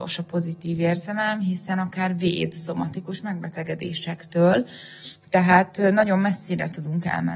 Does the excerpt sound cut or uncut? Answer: uncut